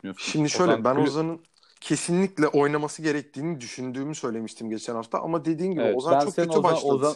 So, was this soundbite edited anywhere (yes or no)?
no